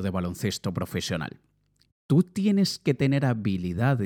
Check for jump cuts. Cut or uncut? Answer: cut